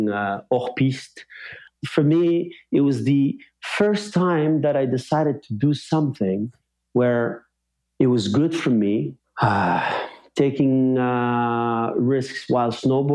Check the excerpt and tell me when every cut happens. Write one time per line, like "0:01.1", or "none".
0:01.8
0:09.2